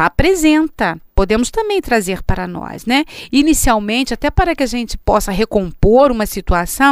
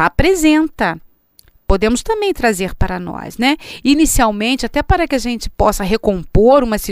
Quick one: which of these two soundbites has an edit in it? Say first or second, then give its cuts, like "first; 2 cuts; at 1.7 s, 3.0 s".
first; 1 cut; at 1.1 s